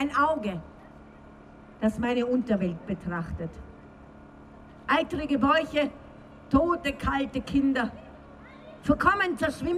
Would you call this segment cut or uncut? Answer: cut